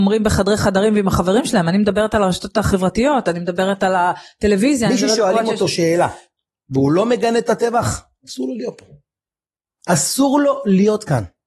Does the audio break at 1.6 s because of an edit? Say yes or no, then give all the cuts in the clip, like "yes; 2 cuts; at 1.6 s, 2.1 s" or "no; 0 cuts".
no; 0 cuts